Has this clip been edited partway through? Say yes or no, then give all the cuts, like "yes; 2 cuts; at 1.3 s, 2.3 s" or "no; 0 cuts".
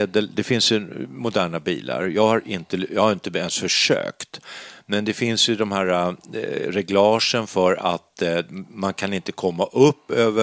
no; 0 cuts